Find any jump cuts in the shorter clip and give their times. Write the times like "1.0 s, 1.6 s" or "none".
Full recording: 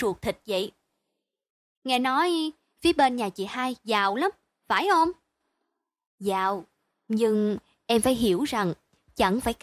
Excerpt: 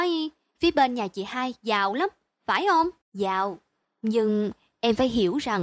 3.0 s